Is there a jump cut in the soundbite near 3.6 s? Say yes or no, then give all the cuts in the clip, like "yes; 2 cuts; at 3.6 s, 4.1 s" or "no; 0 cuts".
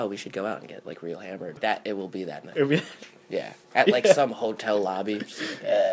yes; 2 cuts; at 1.6 s, 3.6 s